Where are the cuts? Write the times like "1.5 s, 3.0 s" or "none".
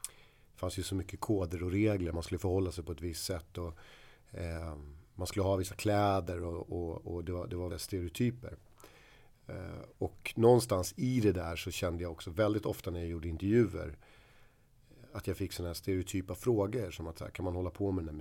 7.7 s